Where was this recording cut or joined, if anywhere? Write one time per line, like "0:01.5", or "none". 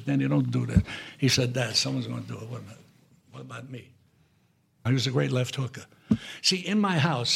0:04.9